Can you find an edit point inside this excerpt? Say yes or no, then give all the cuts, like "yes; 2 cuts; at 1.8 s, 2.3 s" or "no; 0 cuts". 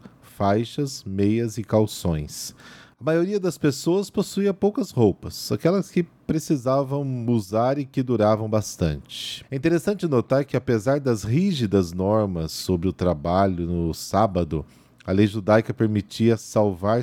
yes; 1 cut; at 9.4 s